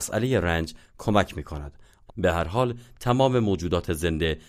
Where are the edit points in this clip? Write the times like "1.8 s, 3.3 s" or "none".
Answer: 2.1 s